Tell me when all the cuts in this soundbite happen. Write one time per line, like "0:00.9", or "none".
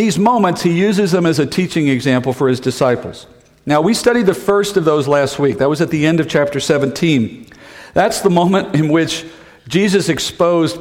none